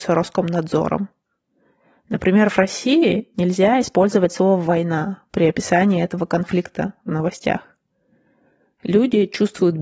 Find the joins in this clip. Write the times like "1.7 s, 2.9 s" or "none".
none

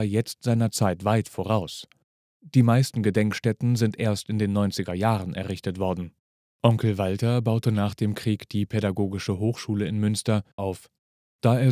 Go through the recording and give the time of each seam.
10.6 s

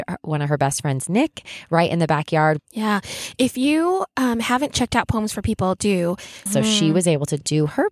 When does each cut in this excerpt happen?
2.6 s, 6.5 s

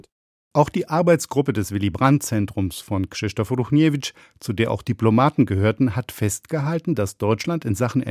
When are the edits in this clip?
none

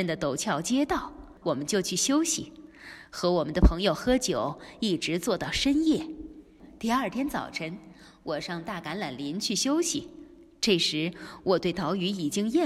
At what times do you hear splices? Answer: 1.4 s

